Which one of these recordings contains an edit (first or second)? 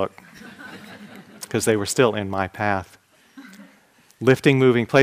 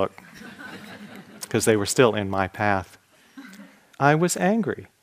second